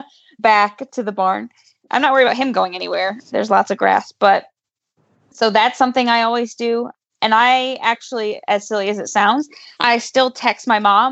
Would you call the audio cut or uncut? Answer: uncut